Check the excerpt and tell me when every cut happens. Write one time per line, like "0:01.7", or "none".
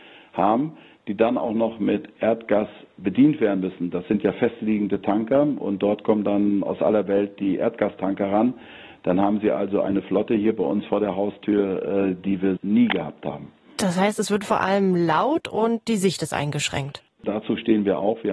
0:12.6
0:17.2